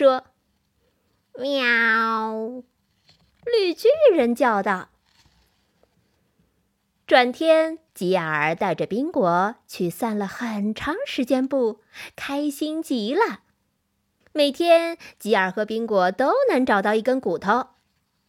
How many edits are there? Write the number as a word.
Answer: two